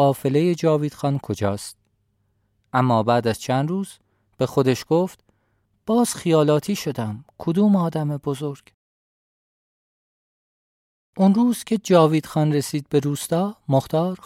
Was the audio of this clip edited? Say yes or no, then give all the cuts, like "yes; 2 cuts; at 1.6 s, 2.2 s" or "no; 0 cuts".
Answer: no; 0 cuts